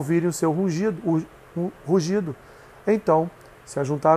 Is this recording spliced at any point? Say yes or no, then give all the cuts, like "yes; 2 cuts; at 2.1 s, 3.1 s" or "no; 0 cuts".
no; 0 cuts